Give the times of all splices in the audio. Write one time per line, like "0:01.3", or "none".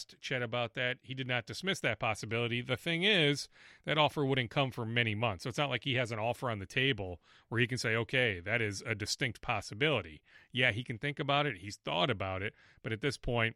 none